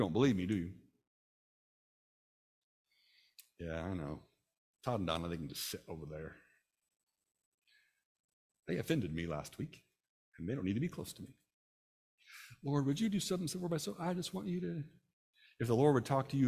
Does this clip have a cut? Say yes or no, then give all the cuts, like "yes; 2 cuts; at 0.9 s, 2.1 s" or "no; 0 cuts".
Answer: no; 0 cuts